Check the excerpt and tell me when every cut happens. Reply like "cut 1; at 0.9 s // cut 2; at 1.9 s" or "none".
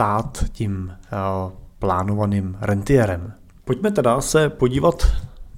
cut 1; at 3.6 s